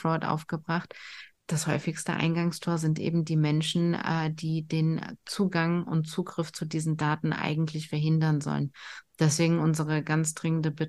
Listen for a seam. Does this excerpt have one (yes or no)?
no